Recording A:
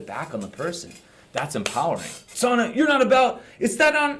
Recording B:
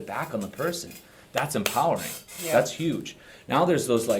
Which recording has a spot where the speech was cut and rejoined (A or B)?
A